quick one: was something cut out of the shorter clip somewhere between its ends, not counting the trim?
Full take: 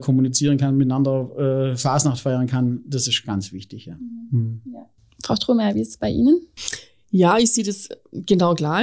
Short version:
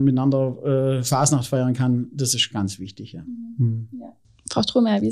no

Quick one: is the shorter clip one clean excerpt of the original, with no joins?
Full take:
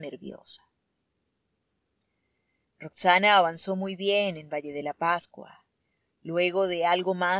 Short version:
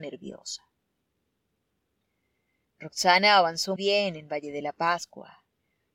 no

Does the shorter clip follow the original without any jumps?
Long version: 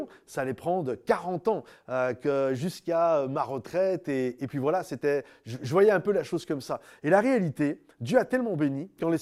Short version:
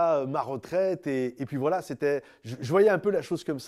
yes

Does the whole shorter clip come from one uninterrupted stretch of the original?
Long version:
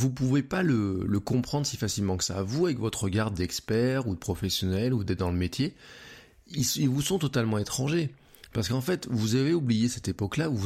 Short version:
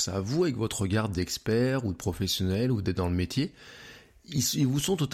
yes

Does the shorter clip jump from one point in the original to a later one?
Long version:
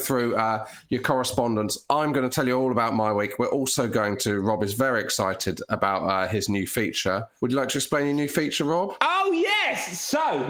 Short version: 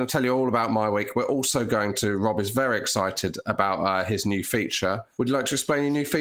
no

